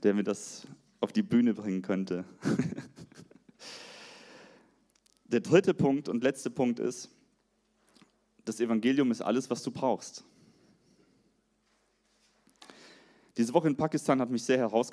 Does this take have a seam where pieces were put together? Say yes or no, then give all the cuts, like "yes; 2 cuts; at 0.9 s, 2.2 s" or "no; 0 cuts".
no; 0 cuts